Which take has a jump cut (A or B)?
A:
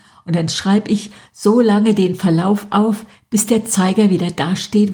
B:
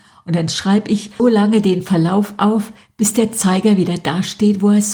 B